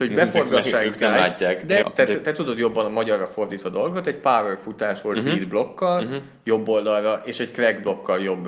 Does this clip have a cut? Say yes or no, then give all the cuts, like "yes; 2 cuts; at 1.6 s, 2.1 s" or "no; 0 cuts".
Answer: yes; 1 cut; at 1.8 s